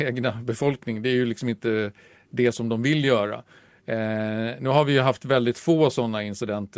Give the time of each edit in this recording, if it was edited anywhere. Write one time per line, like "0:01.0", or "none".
none